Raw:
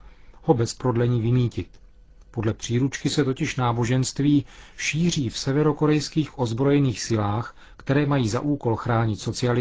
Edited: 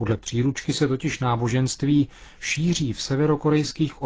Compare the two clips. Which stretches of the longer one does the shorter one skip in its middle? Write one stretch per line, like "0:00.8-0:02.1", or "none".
none